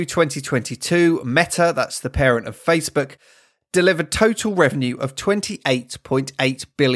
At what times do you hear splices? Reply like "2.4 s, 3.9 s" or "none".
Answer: none